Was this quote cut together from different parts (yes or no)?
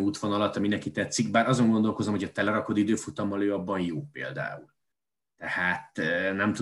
no